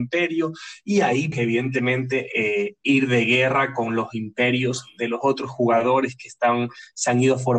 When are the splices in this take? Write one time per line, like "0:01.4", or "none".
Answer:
0:01.3